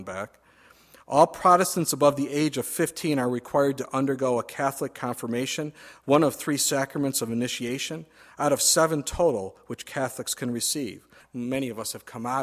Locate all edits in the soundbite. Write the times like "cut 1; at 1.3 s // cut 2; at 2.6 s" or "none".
cut 1; at 11.2 s